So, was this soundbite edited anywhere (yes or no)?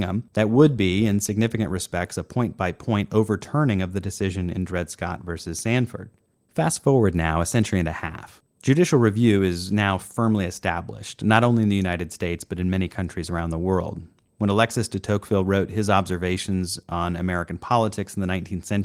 yes